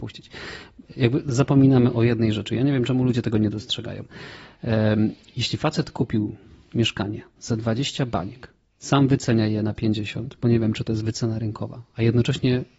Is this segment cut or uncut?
uncut